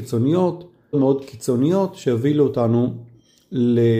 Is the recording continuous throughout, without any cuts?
no; 1 cut; at 0.9 s

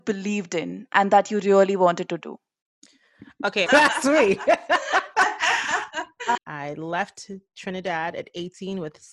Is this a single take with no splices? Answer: no; 2 cuts; at 3.7 s, 6.4 s

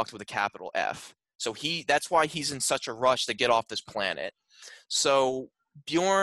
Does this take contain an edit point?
no; 0 cuts

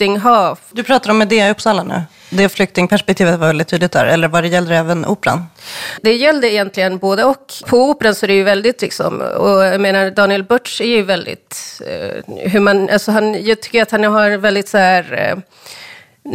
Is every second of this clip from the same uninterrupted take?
yes; 0 cuts

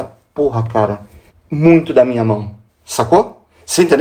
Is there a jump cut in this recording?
yes; 2 cuts; at 1.3 s, 2.7 s

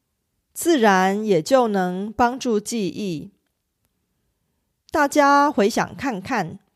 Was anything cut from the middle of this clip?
no; 0 cuts

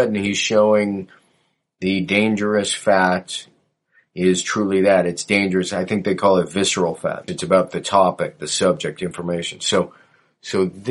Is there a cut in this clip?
yes; 1 cut; at 7.3 s

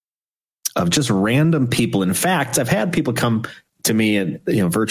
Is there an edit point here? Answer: no; 0 cuts

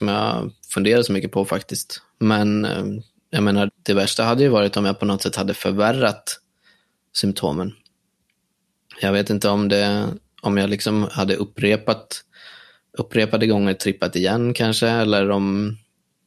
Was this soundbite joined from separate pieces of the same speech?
yes; 1 cut; at 3.7 s

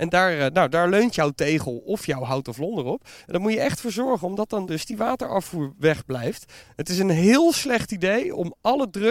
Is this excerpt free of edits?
no; 1 cut; at 6.6 s

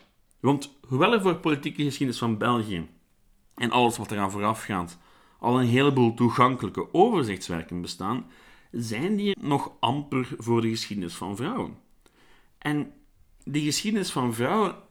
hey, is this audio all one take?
no; 1 cut; at 9.3 s

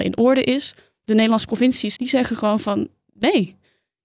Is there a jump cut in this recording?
yes; 1 cut; at 2.0 s

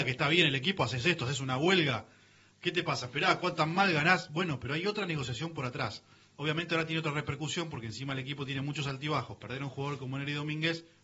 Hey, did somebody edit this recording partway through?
no; 0 cuts

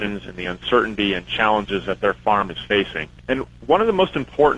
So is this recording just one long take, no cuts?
no; 1 cut; at 3.2 s

